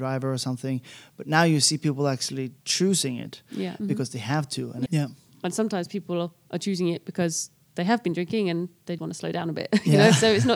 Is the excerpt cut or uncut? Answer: cut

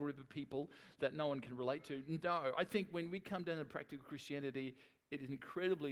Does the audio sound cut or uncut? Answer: uncut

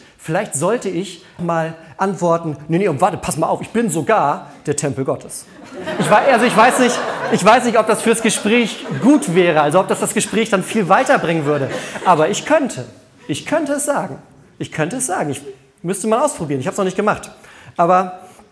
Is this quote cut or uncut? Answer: cut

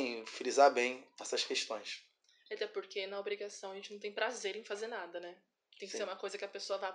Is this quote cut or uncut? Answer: uncut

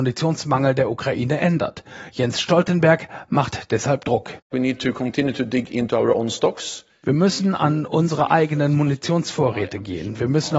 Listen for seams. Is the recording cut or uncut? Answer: uncut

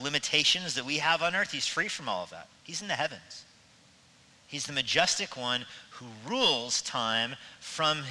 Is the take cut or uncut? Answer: uncut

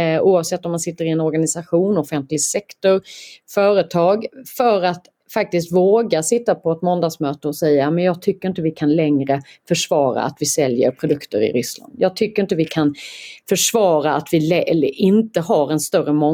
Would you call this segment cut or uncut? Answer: uncut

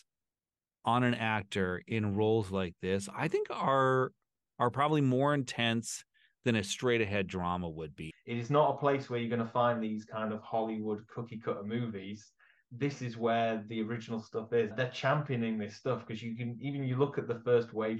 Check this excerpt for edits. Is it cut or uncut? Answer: cut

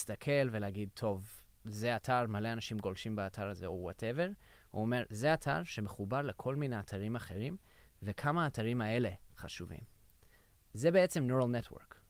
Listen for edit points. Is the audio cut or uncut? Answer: uncut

